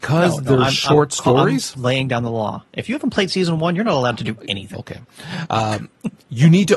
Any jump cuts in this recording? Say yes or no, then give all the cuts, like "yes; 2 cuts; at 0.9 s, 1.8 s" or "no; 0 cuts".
yes; 1 cut; at 4.7 s